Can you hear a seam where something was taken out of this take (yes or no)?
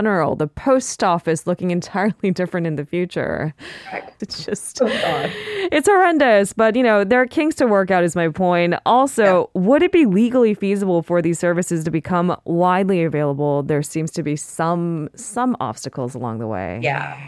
yes